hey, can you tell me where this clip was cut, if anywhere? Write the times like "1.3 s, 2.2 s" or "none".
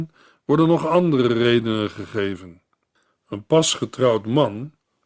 3.1 s